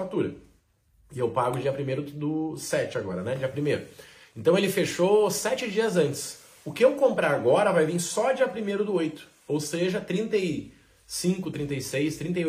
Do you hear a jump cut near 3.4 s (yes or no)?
no